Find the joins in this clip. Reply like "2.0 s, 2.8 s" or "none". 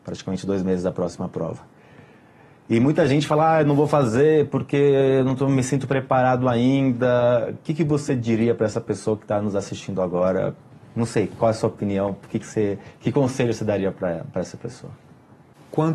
none